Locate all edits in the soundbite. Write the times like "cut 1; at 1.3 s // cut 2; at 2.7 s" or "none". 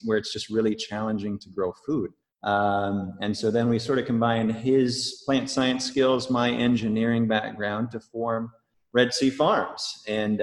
cut 1; at 2.2 s